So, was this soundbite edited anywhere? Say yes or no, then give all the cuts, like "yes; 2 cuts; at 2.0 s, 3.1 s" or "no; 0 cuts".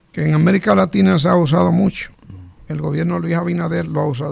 no; 0 cuts